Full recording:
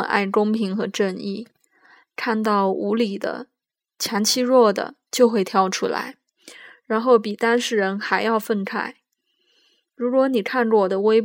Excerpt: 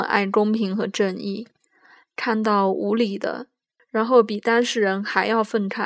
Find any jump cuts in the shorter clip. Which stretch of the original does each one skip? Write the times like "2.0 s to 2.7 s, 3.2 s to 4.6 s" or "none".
3.8 s to 6.8 s